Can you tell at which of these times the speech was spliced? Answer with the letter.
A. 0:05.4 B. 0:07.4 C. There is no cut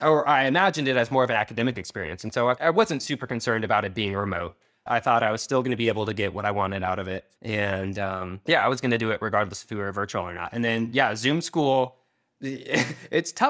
B